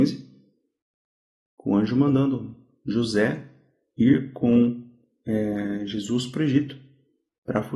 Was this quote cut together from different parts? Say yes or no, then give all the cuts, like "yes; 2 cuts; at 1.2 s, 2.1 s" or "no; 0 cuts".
no; 0 cuts